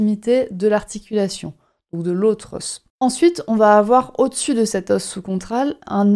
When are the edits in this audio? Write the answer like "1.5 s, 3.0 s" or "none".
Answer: none